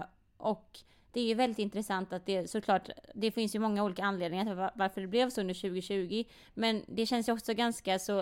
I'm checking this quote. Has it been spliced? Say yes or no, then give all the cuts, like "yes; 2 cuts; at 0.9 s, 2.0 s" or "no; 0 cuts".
no; 0 cuts